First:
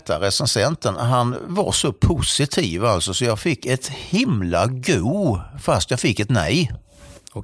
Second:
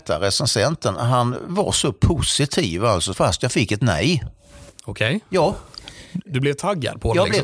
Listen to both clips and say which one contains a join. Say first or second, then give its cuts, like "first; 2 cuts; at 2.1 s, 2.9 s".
second; 1 cut; at 3.1 s